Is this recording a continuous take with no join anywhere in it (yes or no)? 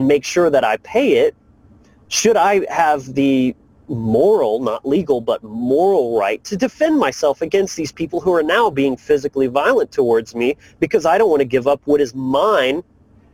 yes